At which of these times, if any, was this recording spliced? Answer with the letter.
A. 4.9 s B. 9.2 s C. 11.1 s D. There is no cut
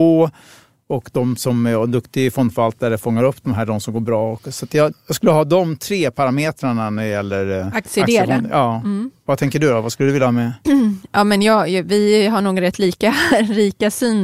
A